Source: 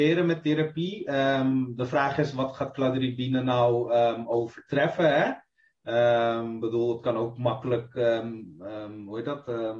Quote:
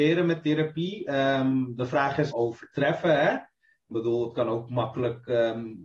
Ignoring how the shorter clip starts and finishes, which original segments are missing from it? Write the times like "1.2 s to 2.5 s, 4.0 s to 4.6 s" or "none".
2.3 s to 4.3 s, 5.9 s to 6.6 s